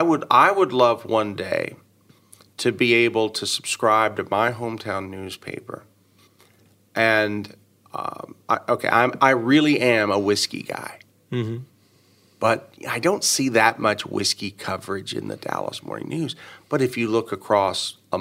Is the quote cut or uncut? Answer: uncut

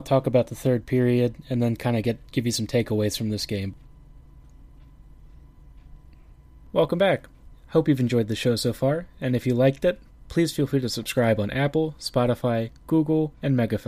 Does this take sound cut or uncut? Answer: uncut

